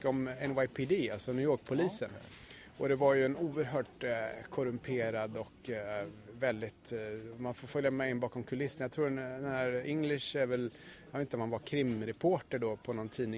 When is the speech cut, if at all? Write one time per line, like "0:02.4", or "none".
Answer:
none